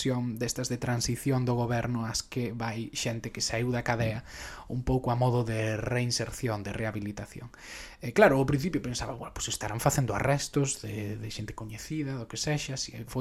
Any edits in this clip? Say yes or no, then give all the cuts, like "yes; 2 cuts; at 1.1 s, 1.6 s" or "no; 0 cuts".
no; 0 cuts